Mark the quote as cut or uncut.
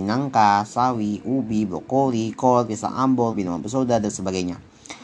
cut